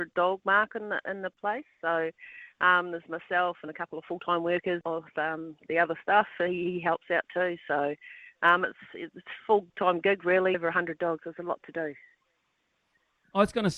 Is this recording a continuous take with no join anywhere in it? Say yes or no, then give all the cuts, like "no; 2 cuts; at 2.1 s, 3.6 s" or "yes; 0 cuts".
no; 2 cuts; at 4.8 s, 10.5 s